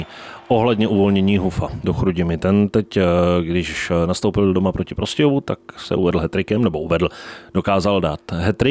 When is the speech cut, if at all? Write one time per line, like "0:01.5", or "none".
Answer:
none